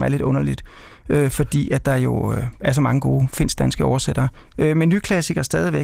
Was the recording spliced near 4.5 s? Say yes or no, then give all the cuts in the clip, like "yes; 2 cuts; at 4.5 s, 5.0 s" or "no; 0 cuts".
yes; 1 cut; at 4.5 s